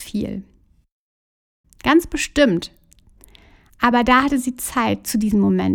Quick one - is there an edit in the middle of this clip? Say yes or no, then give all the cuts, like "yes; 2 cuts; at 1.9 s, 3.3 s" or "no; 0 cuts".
yes; 1 cut; at 1.6 s